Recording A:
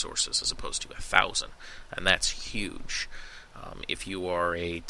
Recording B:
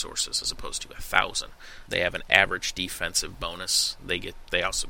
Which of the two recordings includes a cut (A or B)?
B